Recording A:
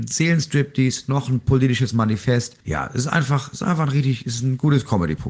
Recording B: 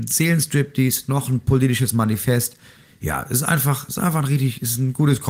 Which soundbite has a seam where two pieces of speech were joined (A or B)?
A